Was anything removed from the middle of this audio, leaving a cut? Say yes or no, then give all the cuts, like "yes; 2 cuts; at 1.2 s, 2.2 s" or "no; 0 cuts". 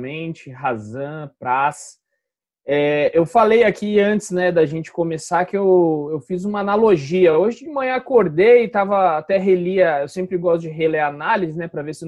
no; 0 cuts